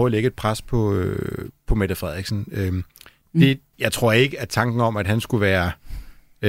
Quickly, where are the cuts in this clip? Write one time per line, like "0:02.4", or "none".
0:03.7